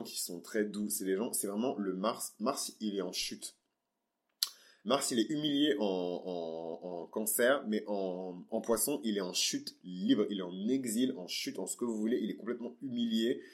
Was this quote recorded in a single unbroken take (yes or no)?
yes